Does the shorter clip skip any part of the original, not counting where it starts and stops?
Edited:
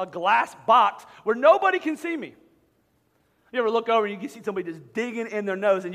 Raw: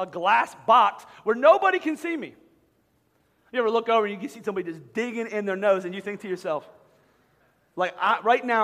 no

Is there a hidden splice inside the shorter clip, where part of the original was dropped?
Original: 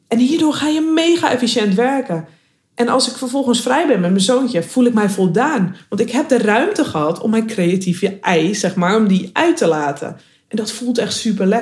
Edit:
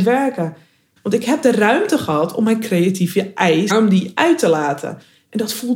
yes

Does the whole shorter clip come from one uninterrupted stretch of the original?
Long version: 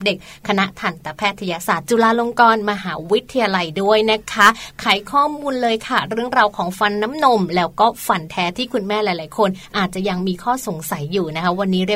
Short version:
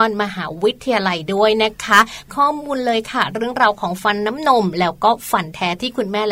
no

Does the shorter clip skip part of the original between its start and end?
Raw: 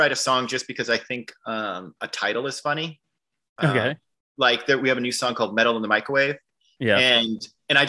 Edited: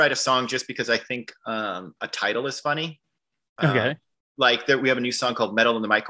no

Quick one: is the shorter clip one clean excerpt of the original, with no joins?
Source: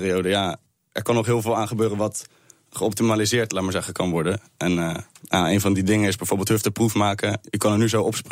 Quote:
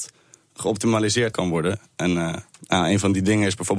no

